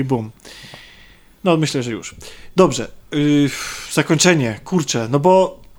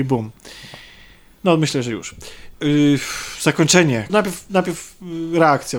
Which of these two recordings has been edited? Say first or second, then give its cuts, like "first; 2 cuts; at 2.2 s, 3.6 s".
second; 2 cuts; at 2.5 s, 4.1 s